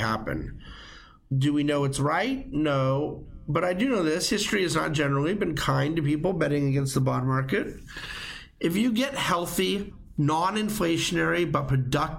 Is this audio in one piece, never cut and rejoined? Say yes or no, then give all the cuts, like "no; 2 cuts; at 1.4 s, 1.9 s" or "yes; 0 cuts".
no; 1 cut; at 1.3 s